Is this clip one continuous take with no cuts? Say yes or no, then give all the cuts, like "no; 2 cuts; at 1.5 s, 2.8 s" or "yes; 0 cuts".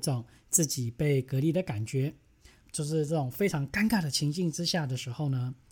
no; 1 cut; at 2.6 s